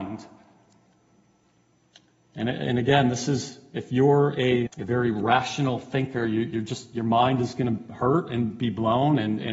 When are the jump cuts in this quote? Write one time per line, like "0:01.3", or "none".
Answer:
0:04.7